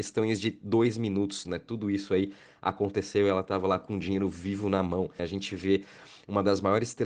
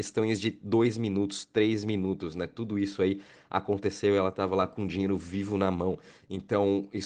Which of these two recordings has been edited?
first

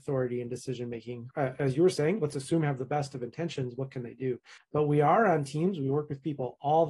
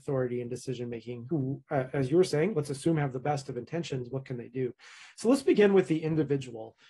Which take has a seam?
first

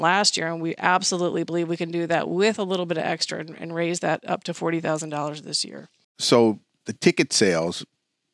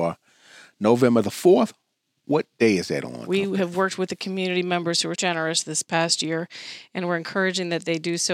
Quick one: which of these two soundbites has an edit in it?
second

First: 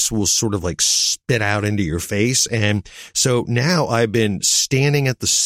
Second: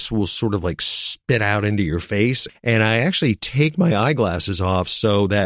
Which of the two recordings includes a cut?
second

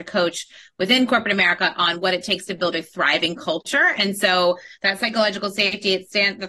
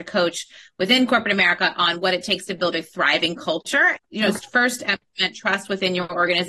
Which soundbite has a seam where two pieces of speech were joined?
second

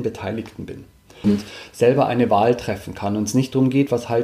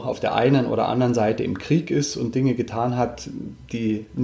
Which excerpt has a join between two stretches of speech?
first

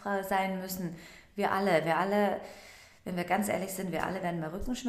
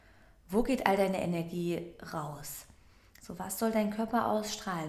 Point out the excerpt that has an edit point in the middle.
second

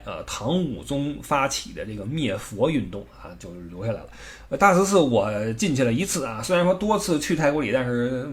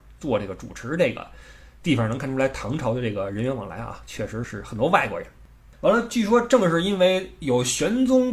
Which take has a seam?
second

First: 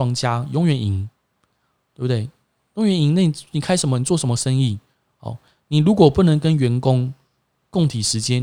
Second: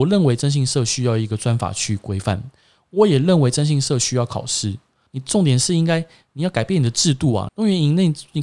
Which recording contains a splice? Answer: second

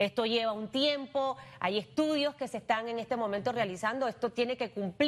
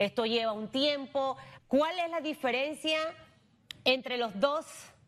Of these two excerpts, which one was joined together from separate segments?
second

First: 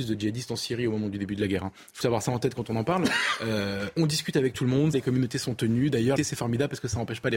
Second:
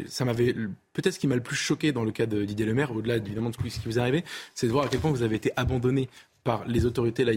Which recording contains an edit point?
first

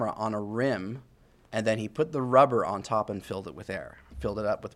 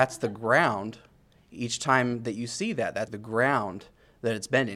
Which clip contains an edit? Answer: second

